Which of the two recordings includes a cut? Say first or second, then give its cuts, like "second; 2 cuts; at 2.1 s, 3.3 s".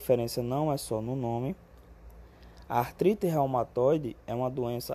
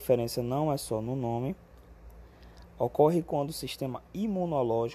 second; 1 cut; at 2.6 s